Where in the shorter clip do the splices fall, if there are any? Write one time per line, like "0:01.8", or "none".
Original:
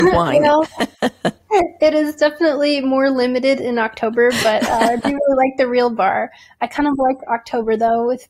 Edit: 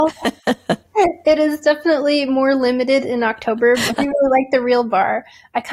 0:03.9